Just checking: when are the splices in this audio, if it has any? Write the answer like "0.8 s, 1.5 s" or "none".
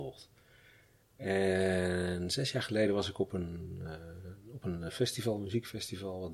none